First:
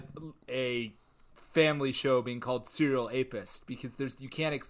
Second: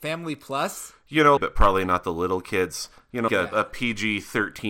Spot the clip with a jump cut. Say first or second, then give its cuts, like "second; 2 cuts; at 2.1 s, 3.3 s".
second; 2 cuts; at 1.4 s, 3.3 s